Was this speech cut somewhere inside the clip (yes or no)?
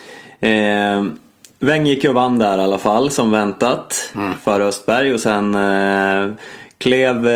no